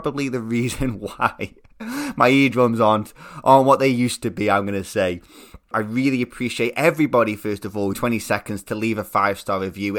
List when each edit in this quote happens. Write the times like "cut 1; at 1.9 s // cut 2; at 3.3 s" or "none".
cut 1; at 5.7 s // cut 2; at 7.9 s